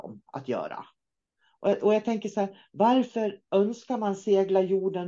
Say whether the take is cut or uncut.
uncut